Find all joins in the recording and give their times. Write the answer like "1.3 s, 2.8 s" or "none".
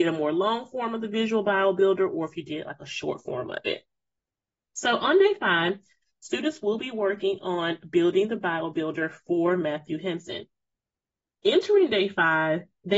none